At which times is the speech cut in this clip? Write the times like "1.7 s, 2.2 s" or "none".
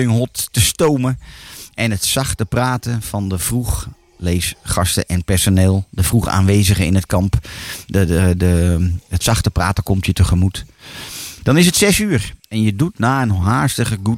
12.4 s